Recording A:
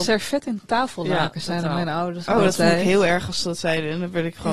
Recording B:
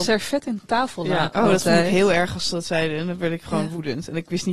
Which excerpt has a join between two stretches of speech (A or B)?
B